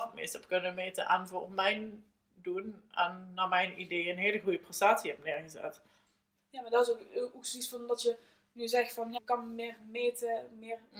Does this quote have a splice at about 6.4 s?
yes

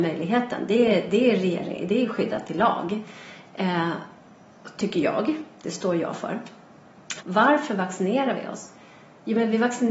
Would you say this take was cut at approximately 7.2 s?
yes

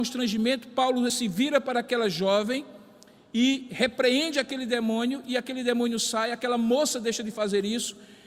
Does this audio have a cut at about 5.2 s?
no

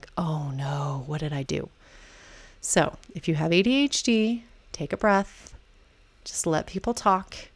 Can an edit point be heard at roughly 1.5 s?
yes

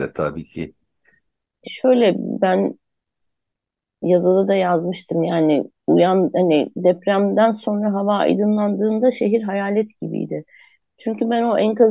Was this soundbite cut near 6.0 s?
no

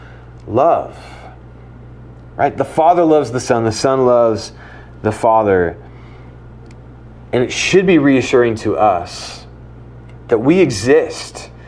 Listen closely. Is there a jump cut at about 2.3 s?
no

